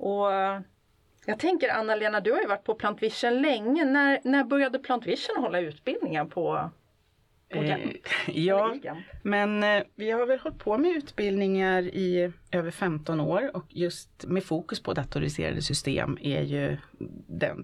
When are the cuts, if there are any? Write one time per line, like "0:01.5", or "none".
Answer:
0:09.2
0:14.2